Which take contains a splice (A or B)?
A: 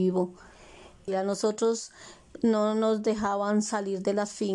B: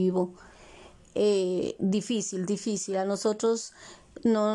A